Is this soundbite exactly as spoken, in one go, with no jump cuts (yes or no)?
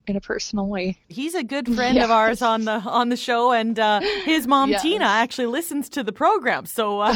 no